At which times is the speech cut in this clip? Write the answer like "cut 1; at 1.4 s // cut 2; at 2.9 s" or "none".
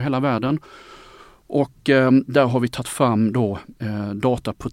none